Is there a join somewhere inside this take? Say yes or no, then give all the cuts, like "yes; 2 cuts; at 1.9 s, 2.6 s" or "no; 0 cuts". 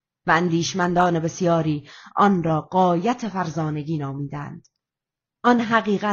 no; 0 cuts